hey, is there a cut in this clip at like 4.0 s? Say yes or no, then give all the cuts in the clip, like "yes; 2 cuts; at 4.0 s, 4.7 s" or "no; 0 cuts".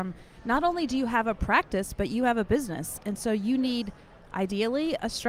no; 0 cuts